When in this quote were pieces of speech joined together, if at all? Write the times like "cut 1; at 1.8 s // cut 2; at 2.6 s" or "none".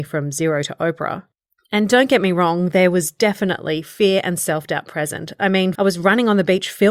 cut 1; at 5.7 s